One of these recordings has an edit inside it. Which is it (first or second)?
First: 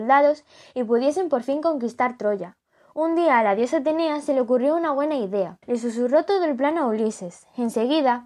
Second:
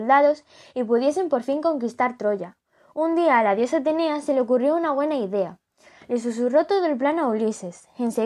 first